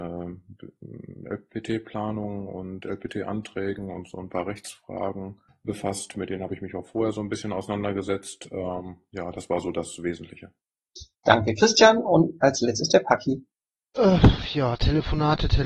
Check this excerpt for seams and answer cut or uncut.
uncut